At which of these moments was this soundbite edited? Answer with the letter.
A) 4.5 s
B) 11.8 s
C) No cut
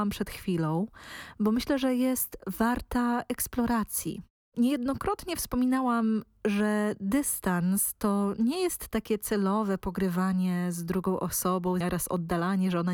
B